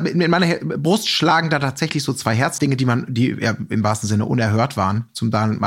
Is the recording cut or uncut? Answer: cut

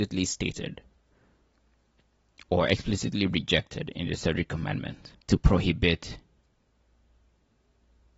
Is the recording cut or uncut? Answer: cut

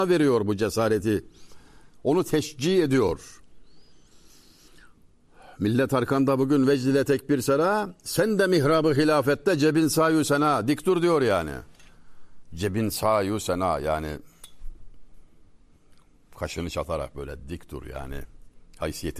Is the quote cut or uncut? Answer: uncut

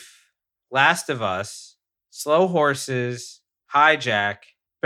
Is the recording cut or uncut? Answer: cut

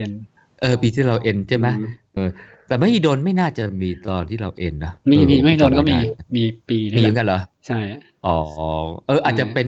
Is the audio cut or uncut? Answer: cut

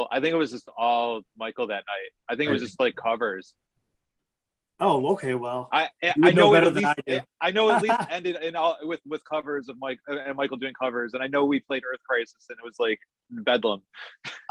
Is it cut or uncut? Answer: uncut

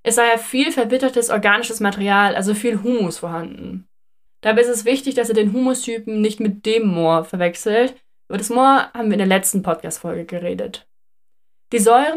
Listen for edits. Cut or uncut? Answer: cut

